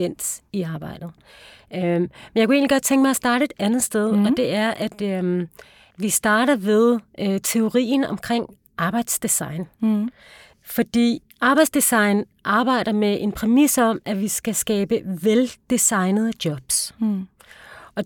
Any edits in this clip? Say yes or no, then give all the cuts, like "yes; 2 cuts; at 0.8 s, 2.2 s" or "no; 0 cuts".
yes; 1 cut; at 11.3 s